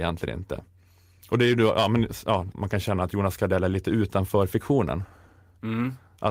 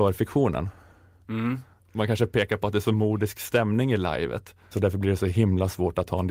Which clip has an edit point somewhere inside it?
second; 2 cuts; at 1.8 s, 4.7 s

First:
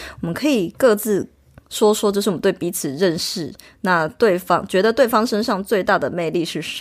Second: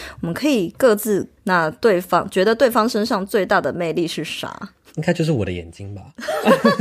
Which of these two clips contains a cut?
second; 1 cut; at 1.4 s

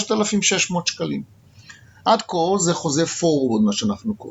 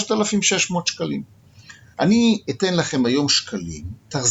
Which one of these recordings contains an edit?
second; 1 cut; at 1.9 s

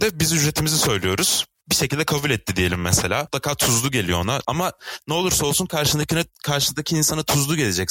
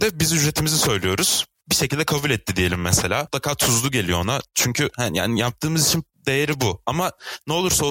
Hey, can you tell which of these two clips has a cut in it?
first; 1 cut; at 4.4 s

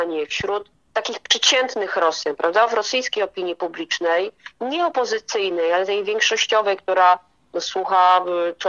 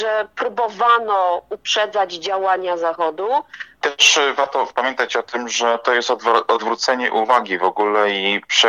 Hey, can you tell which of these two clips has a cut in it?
second; 1 cut; at 3.8 s

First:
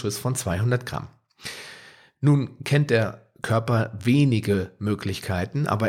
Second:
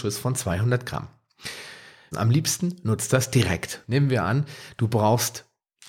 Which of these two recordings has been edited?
second; 2 cuts; at 2.1 s, 3.8 s

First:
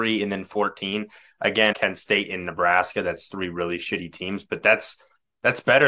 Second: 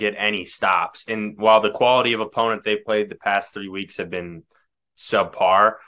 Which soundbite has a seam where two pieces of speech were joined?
first; 1 cut; at 1.7 s

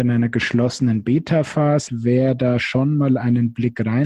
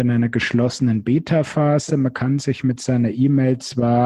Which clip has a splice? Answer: first; 1 cut; at 1.9 s

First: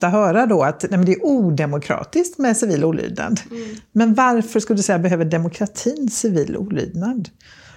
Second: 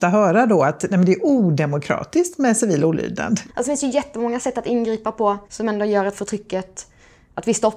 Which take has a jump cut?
second; 2 cuts; at 3.5 s, 5.4 s

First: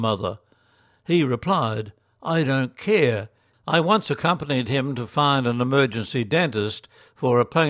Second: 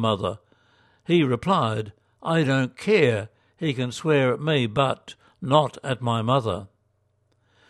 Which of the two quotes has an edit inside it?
first; 1 cut; at 3.5 s

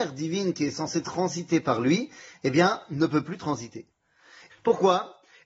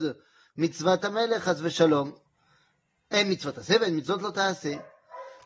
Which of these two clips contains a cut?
first; 1 cut; at 4.5 s

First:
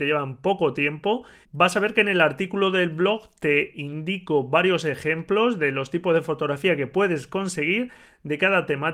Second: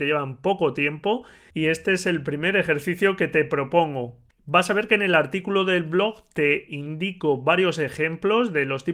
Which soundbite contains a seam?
first; 1 cut; at 1.4 s

